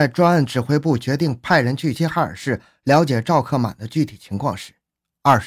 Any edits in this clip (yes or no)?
yes